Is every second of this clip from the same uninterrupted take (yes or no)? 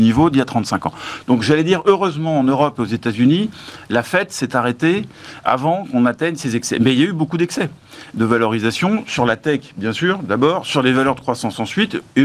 yes